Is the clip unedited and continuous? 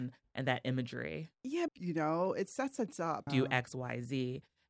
no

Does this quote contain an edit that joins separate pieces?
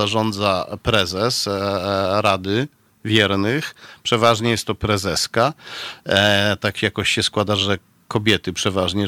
no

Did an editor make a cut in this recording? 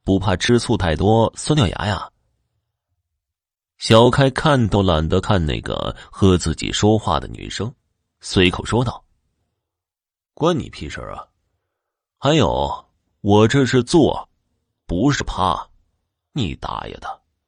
no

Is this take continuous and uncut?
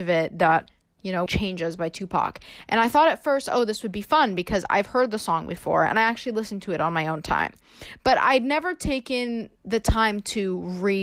no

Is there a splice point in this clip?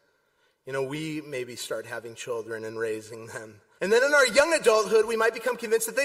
yes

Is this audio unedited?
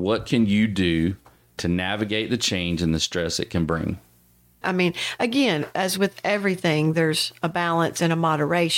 no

